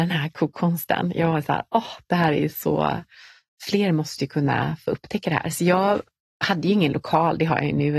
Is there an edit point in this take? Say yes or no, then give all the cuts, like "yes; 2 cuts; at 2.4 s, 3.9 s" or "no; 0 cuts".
no; 0 cuts